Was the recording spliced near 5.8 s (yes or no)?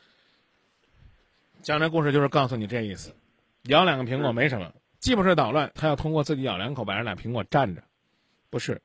yes